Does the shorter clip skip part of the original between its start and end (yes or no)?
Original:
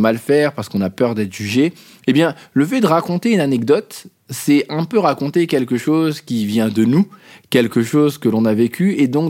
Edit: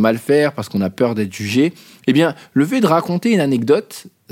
no